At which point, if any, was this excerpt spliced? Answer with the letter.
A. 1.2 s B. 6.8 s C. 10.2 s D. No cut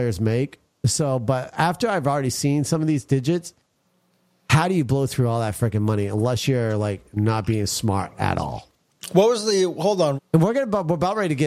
C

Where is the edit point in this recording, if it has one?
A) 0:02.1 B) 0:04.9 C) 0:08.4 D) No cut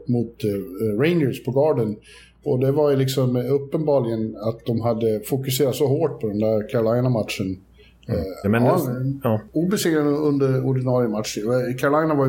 C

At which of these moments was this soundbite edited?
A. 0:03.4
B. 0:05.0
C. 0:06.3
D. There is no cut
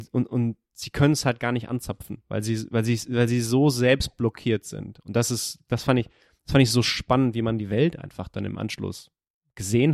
D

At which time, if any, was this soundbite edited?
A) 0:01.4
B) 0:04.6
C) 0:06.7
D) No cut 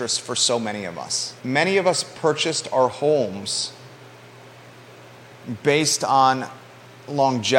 A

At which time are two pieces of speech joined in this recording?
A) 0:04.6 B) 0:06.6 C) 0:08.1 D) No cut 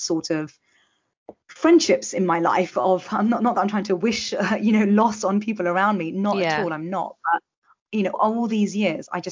C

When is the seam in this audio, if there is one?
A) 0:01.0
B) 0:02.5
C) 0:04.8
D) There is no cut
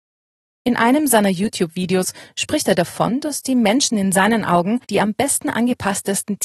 C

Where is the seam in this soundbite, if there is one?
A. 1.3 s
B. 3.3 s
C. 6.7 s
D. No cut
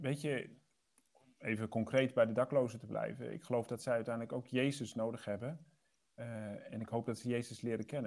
C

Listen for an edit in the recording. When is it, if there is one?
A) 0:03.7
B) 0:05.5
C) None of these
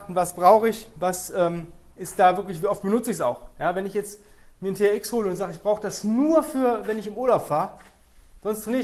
C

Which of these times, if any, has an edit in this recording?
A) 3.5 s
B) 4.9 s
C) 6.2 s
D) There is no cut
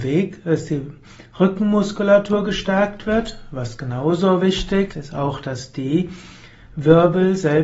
B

